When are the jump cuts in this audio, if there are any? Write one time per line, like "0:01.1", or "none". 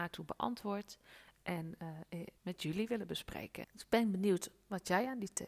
0:02.4
0:03.6